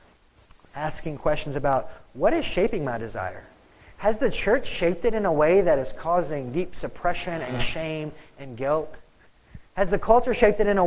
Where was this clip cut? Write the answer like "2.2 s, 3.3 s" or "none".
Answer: none